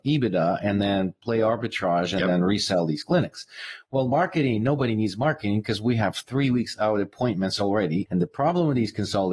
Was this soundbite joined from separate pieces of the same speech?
yes; 1 cut; at 8.1 s

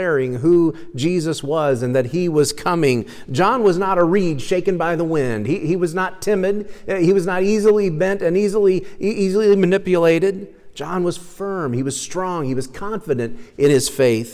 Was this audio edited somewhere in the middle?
no; 0 cuts

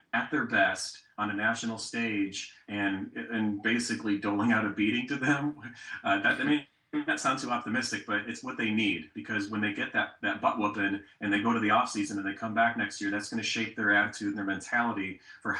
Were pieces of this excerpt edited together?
no; 0 cuts

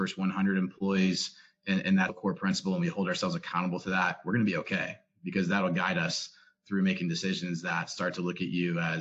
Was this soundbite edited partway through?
yes; 1 cut; at 2.1 s

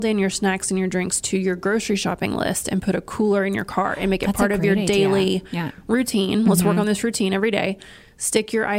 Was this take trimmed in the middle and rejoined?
no; 0 cuts

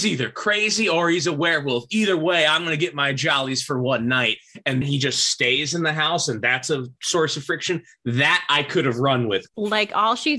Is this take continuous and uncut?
no; 2 cuts; at 4.8 s, 9.5 s

